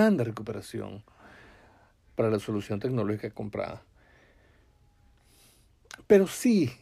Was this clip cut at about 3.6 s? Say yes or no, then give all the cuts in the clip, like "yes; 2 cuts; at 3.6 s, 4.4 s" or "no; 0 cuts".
no; 1 cut; at 2.0 s